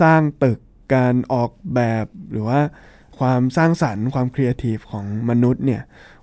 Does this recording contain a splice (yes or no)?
no